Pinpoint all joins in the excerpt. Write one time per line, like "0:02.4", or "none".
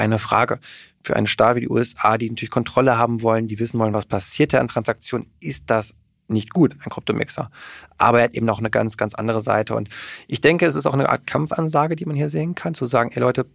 none